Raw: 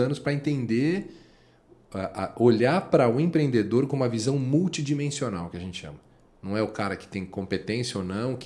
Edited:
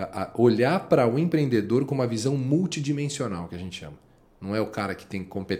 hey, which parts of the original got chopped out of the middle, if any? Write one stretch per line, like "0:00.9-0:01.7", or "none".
none